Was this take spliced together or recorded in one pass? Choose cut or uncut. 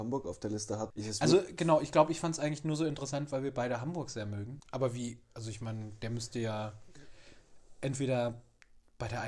cut